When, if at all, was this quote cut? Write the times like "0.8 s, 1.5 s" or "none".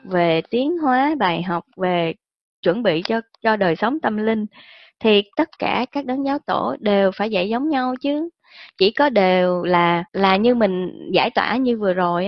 10.1 s